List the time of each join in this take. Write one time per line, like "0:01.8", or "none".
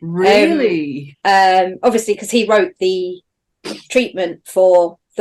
0:01.1